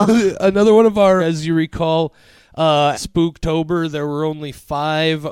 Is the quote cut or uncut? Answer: cut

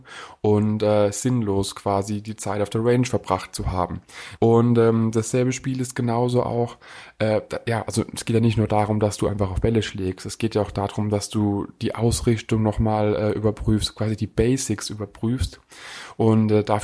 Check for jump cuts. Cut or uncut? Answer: cut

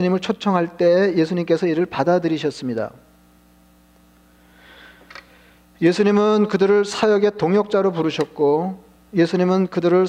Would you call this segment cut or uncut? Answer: uncut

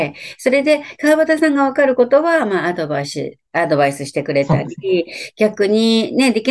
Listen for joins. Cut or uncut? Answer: uncut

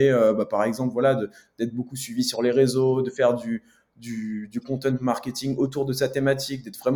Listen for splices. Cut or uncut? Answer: uncut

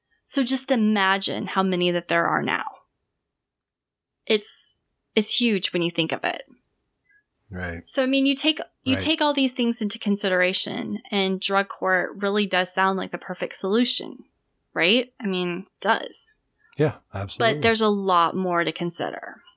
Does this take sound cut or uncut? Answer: uncut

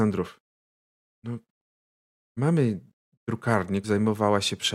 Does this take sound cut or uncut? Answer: cut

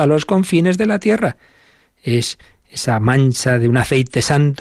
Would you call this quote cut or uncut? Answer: uncut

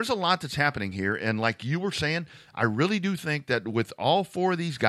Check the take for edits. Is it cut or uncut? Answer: uncut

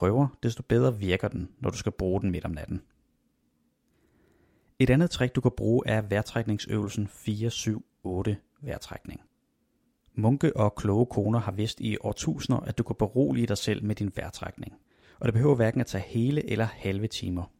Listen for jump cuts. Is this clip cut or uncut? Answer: uncut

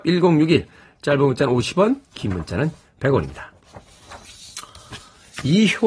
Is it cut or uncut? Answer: uncut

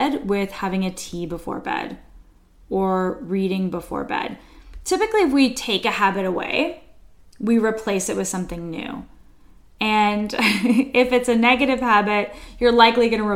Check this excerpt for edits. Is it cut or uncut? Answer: uncut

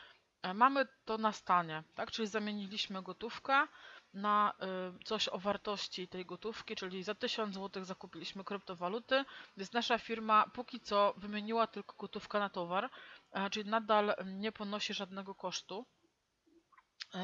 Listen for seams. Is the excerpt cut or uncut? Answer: uncut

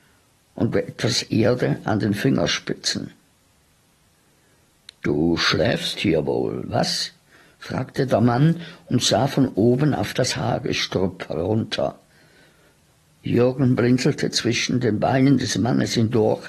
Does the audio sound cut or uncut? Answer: uncut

